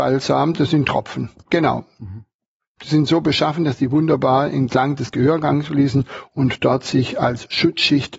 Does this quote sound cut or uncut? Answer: cut